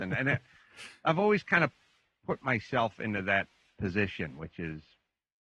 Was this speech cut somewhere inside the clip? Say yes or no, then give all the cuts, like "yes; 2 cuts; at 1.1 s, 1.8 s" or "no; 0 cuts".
no; 0 cuts